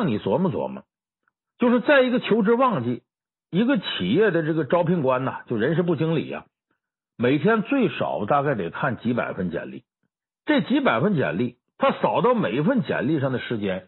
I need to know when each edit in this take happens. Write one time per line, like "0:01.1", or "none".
0:10.4